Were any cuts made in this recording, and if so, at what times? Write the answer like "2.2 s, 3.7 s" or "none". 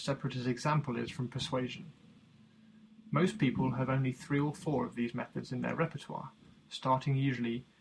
none